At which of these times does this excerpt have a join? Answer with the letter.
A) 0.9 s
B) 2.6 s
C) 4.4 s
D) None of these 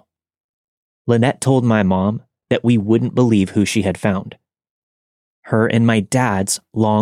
A